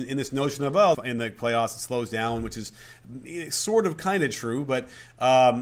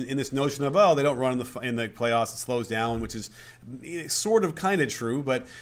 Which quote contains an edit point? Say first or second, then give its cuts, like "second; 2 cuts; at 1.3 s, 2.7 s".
first; 1 cut; at 0.9 s